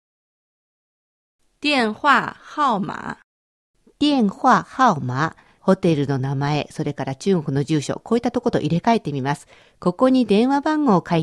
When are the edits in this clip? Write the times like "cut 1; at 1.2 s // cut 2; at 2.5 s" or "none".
cut 1; at 5.6 s